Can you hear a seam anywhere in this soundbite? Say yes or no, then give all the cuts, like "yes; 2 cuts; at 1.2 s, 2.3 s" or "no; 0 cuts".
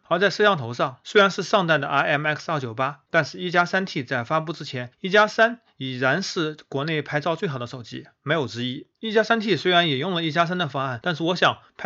no; 0 cuts